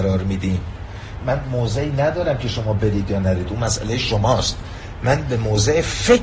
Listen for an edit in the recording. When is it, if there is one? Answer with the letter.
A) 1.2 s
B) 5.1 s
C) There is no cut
A